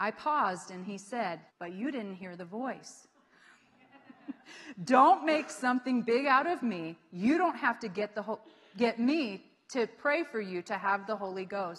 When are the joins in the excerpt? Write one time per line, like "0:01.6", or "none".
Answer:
0:01.5
0:04.4